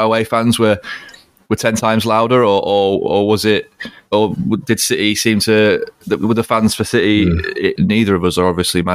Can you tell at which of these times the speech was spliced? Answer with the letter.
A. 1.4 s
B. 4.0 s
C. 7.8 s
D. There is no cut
C